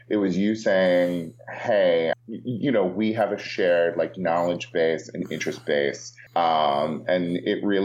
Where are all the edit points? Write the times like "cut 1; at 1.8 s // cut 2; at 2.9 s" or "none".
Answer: cut 1; at 2.1 s // cut 2; at 6.3 s

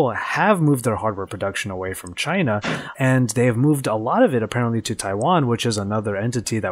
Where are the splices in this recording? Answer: cut 1; at 2.9 s

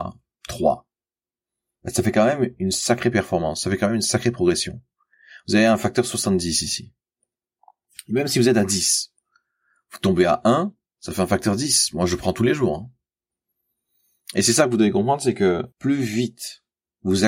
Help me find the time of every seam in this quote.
cut 1; at 15.7 s

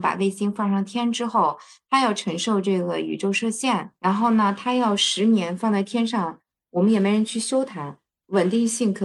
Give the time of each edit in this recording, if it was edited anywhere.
cut 1; at 4.0 s

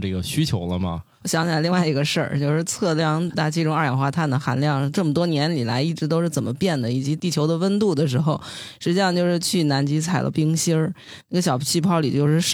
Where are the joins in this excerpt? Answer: cut 1; at 1.2 s // cut 2; at 11.2 s

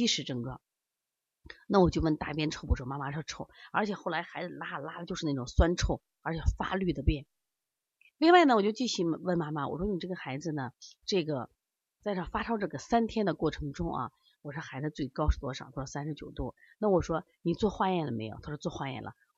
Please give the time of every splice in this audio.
none

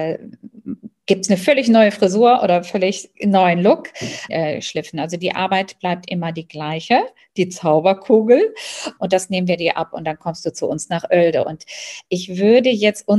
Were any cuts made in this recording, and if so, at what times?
cut 1; at 4.3 s // cut 2; at 9.0 s

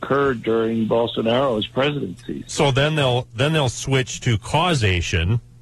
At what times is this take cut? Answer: cut 1; at 2.5 s

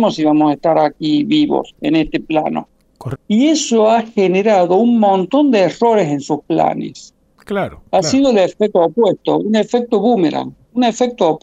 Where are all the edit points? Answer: cut 1; at 3.1 s // cut 2; at 7.4 s

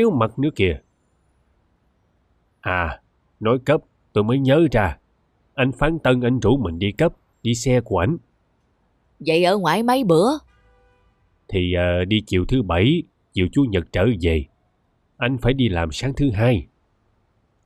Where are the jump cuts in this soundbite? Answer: cut 1; at 7.3 s

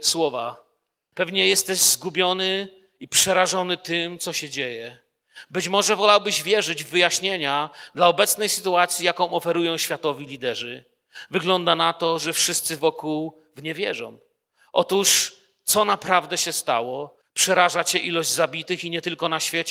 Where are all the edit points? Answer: cut 1; at 1.1 s // cut 2; at 5.5 s // cut 3; at 17.2 s

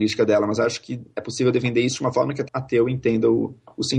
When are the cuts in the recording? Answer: cut 1; at 2.5 s

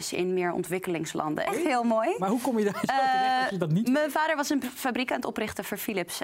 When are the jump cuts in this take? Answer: cut 1; at 1.5 s

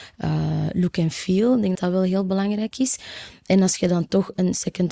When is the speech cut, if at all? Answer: cut 1; at 1.7 s

